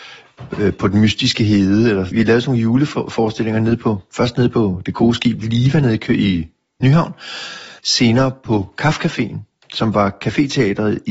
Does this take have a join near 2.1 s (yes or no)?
yes